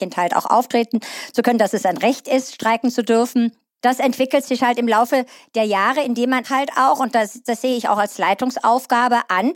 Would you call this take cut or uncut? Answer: cut